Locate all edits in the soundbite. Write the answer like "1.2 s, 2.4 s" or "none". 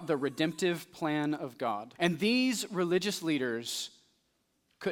2.0 s